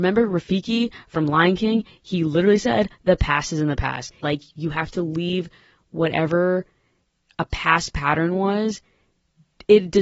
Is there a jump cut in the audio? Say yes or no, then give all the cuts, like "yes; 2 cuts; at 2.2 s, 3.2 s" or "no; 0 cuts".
yes; 1 cut; at 4.2 s